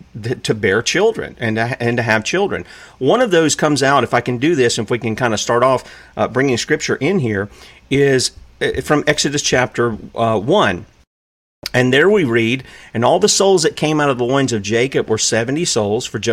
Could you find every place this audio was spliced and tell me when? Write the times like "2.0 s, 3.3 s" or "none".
none